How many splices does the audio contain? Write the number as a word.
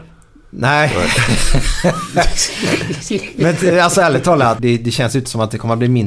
one